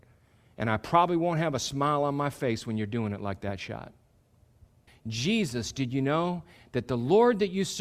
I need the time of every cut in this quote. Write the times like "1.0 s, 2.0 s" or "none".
4.9 s